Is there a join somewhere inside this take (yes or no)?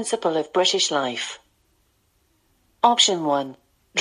no